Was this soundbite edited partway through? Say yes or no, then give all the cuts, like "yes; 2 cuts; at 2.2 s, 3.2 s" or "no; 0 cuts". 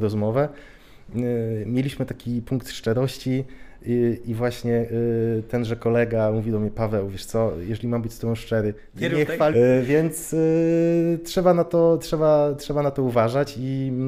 yes; 1 cut; at 9.5 s